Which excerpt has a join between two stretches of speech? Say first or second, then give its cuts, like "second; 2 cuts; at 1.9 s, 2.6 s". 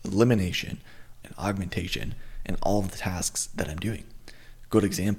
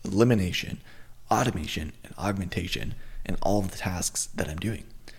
first; 1 cut; at 1.2 s